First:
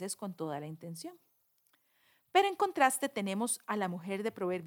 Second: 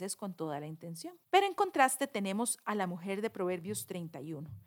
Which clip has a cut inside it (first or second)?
second